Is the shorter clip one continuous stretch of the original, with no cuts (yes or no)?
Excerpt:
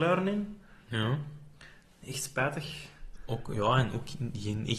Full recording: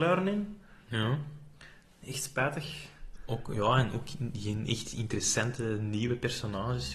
yes